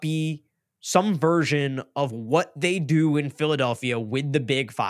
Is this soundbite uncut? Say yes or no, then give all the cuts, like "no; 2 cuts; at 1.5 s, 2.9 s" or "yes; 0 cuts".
yes; 0 cuts